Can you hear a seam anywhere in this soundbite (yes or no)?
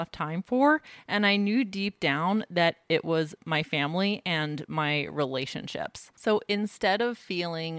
no